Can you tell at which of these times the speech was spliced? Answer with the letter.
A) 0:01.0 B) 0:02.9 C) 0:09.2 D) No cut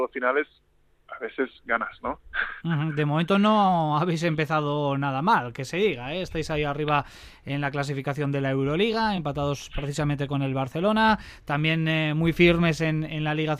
D